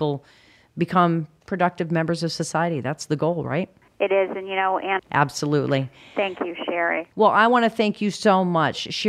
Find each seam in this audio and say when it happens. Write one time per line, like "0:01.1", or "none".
0:05.0
0:07.1